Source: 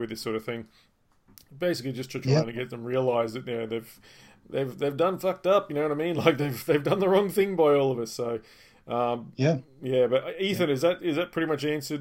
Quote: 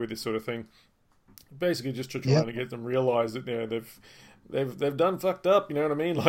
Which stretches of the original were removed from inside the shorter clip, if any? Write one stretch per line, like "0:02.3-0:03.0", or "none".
none